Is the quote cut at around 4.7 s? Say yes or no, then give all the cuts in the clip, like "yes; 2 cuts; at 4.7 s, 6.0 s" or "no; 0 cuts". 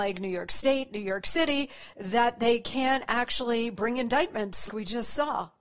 yes; 1 cut; at 4.7 s